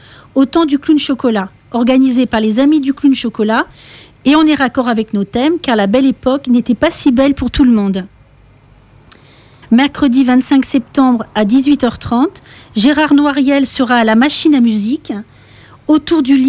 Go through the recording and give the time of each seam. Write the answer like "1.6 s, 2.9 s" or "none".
9.6 s